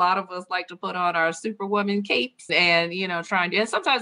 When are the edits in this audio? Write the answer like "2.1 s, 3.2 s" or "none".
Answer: 2.5 s